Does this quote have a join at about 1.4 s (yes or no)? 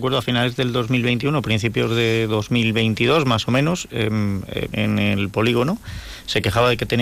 no